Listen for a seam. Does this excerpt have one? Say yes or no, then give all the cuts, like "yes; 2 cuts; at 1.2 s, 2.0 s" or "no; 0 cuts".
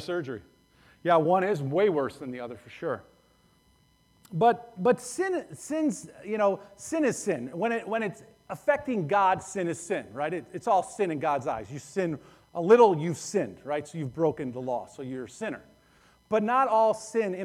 no; 0 cuts